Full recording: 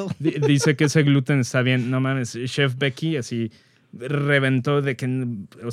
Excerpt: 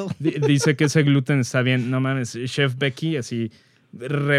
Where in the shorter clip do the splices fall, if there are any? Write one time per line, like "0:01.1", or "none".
none